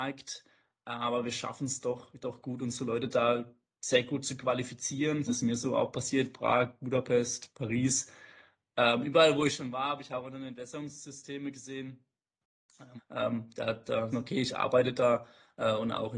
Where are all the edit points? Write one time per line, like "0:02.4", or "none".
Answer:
0:05.3
0:13.0
0:14.1